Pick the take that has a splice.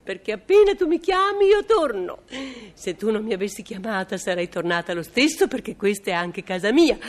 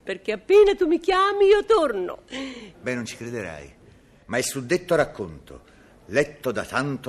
second; 1 cut; at 2.7 s

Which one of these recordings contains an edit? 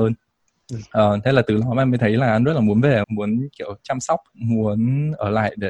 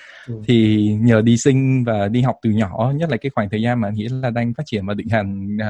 first; 2 cuts; at 3.0 s, 4.3 s

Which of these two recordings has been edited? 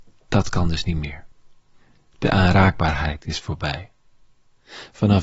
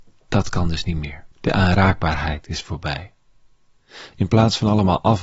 second; 2 cuts; at 1.3 s, 4.1 s

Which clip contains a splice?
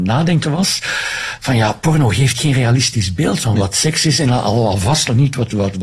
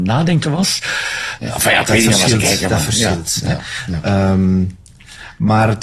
second; 1 cut; at 1.4 s

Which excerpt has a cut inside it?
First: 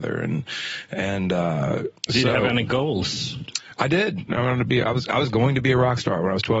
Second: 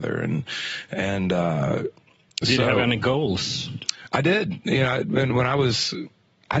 first; 2 cuts; at 2.0 s, 4.3 s

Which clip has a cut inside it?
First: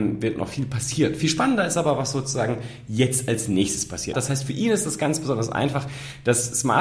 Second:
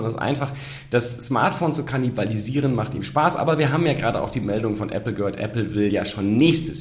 first; 1 cut; at 4.1 s

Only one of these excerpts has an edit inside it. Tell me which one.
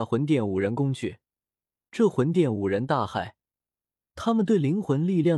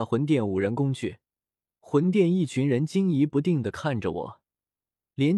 second; 1 cut; at 1.6 s

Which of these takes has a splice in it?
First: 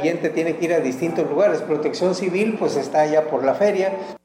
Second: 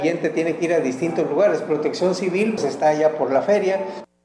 second; 1 cut; at 2.6 s

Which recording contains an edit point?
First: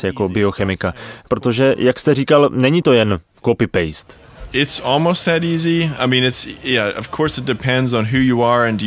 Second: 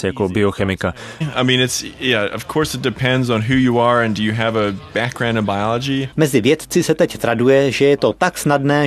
second; 2 cuts; at 1.2 s, 6.1 s

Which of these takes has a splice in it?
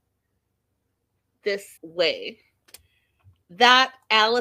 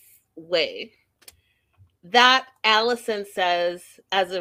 first; 1 cut; at 1.8 s

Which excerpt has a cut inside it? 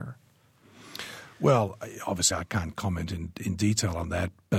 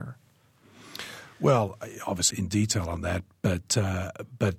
second; 1 cut; at 2.3 s

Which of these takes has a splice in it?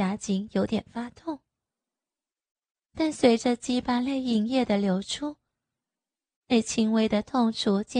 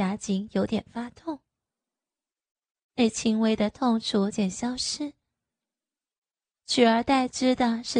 second; 2 cuts; at 2.8 s, 4.3 s

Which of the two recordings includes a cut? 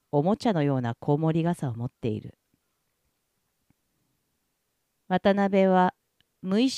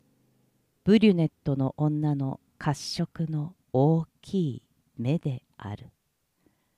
second; 2 cuts; at 2.5 s, 3.6 s

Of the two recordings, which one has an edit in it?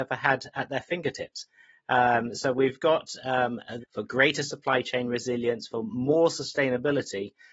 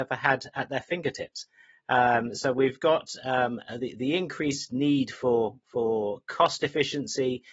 first; 1 cut; at 3.8 s

